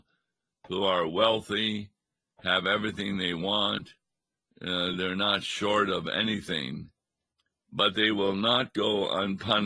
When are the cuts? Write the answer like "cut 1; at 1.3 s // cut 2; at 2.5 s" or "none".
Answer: none